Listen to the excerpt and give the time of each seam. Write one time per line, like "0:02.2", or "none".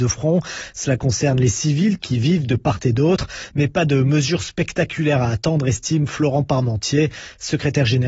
none

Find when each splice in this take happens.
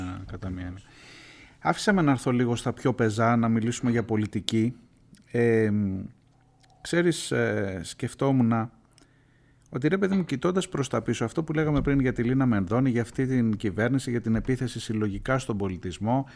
none

